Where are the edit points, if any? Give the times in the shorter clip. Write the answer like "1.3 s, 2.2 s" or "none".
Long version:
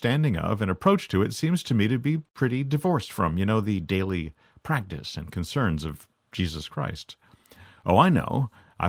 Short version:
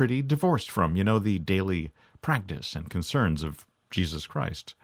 none